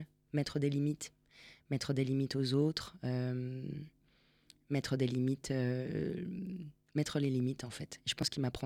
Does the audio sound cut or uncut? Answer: uncut